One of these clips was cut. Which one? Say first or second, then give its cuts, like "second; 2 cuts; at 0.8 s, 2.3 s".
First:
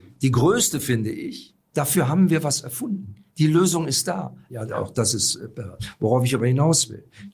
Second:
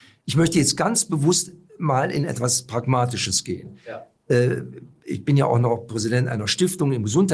first; 2 cuts; at 1.7 s, 4.5 s